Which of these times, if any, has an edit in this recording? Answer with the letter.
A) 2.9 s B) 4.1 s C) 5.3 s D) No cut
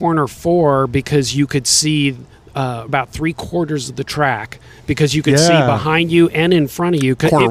A